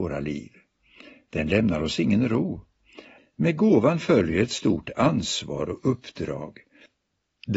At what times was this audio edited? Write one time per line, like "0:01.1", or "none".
0:03.2